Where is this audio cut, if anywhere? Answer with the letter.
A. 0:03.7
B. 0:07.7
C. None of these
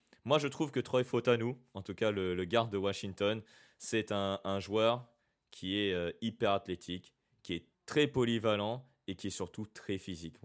B